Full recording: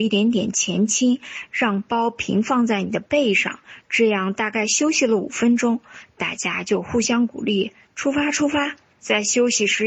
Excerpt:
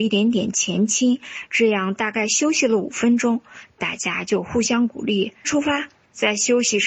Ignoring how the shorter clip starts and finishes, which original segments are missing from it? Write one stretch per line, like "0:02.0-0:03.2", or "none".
0:01.5-0:03.8
0:07.8-0:08.3